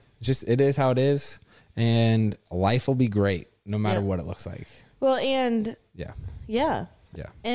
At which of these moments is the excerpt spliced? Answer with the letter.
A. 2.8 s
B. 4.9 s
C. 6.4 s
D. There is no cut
D